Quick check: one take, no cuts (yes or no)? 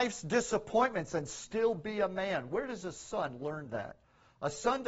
yes